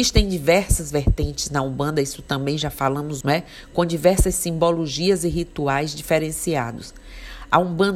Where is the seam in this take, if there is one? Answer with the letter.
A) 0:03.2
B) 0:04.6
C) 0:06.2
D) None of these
A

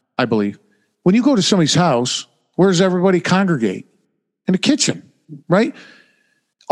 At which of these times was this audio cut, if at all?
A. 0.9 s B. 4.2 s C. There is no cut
C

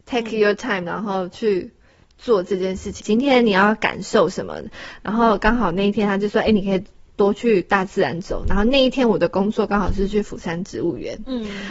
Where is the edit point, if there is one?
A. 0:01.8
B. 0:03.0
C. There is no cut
B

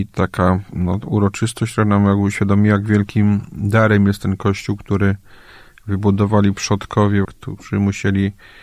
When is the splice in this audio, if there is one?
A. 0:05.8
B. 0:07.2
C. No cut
B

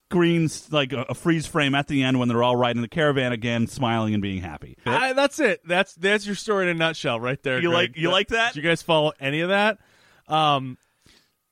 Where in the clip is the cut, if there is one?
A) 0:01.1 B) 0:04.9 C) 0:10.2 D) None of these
B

